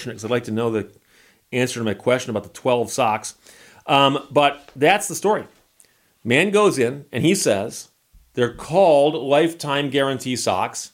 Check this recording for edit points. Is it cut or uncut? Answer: uncut